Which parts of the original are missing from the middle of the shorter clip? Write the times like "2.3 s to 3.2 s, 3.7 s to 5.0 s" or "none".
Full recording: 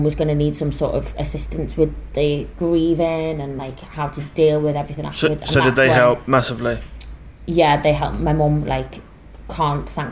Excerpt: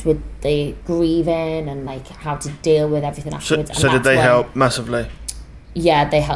none

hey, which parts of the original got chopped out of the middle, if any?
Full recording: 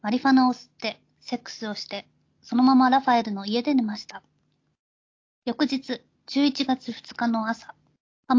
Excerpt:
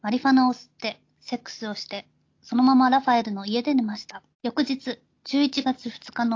4.3 s to 5.3 s

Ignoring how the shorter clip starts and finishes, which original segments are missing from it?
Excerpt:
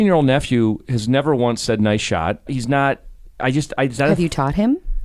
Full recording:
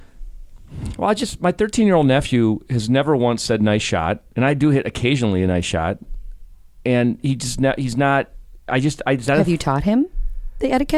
4.3 s to 7.8 s

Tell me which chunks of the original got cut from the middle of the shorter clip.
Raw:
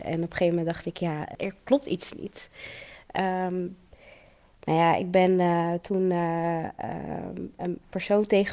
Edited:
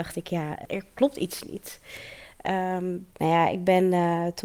3.8 s to 4.6 s

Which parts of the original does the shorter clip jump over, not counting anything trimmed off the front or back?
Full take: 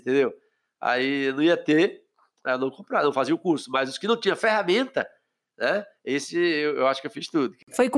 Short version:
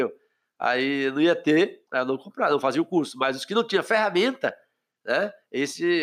2.1 s to 2.4 s

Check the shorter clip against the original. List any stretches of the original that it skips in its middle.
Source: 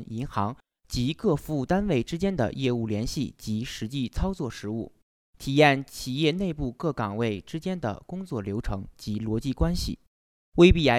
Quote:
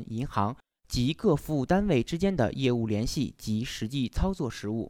none

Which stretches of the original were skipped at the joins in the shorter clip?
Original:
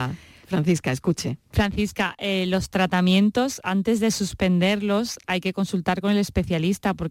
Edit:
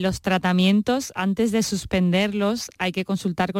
none

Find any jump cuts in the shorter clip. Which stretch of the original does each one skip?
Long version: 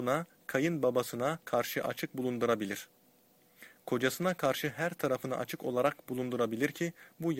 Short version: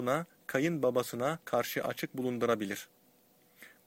none

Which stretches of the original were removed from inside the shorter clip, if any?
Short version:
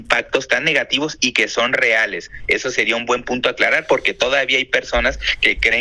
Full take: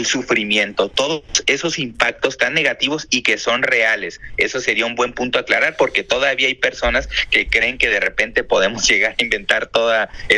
none

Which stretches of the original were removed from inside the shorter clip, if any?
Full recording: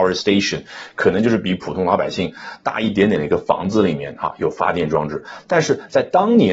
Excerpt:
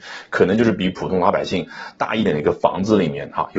2.9 s to 3.1 s

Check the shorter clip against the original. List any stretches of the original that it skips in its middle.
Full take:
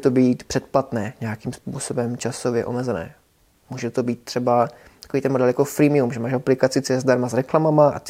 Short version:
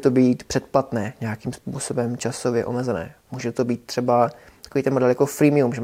3.2 s to 3.6 s

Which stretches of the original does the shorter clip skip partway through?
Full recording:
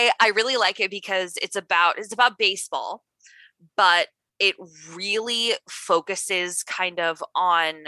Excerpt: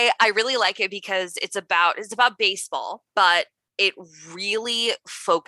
3.1 s to 3.7 s

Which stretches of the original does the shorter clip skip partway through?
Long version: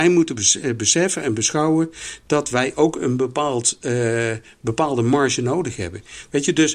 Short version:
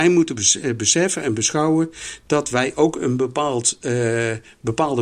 none

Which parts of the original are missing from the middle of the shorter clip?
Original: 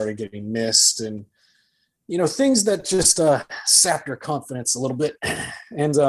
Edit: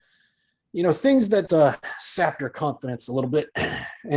2.8 s to 3.1 s

